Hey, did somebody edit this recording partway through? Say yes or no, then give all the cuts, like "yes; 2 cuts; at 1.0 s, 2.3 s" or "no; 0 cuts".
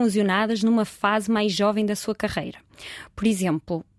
no; 0 cuts